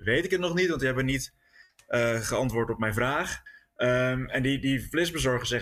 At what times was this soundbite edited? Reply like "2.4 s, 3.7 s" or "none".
none